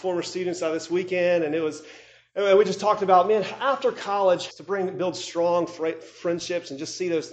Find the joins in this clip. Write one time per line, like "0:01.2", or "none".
0:04.5

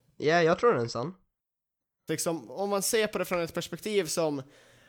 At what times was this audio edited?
0:02.1

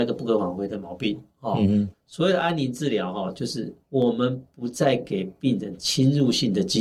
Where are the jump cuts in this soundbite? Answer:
0:01.9
0:03.8

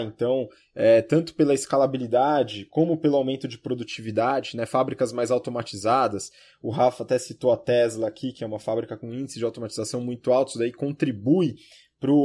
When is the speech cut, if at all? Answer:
none

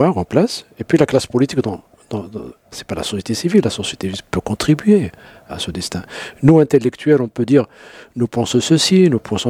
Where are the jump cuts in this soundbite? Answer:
none

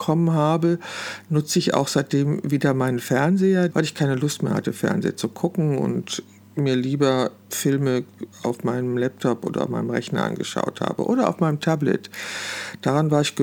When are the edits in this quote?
0:03.7
0:08.3

